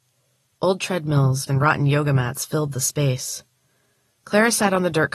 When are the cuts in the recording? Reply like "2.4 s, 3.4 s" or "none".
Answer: 1.5 s